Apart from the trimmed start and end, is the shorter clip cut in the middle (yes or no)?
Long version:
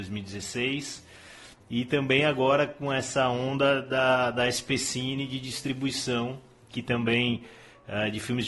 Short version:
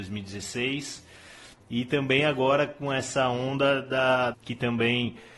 yes